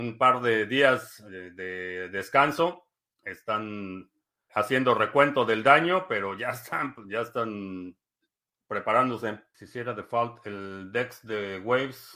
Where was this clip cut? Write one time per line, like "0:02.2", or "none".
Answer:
0:04.5